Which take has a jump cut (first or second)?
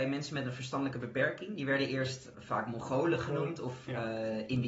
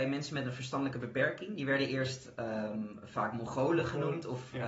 first